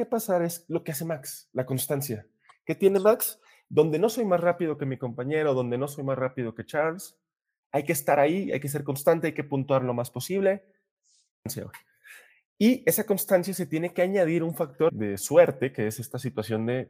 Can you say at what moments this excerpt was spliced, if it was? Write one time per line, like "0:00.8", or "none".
0:14.9